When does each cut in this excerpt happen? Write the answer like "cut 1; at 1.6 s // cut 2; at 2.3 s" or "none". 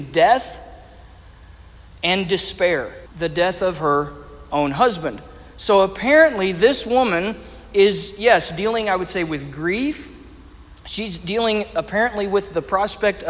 cut 1; at 3.1 s